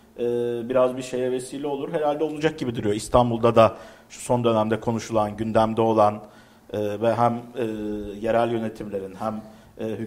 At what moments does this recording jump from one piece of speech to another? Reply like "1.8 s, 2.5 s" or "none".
none